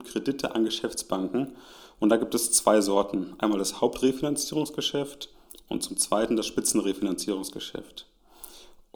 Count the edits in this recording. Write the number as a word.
zero